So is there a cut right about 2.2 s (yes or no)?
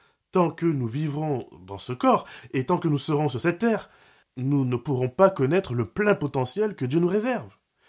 no